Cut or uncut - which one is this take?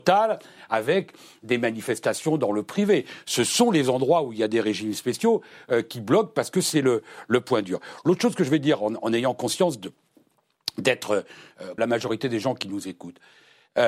cut